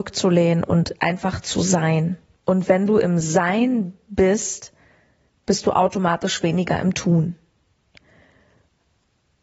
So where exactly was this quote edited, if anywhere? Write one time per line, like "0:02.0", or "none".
0:02.4